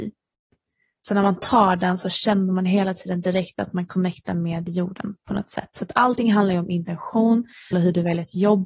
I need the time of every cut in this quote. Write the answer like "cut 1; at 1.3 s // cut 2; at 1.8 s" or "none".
cut 1; at 7.7 s